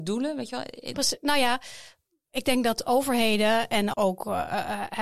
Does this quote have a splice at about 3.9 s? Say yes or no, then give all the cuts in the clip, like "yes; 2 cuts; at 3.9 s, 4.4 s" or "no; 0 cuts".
yes; 2 cuts; at 0.9 s, 3.9 s